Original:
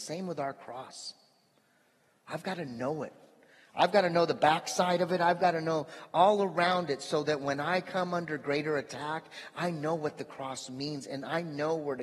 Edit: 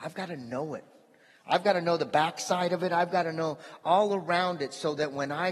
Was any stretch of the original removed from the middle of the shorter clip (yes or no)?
no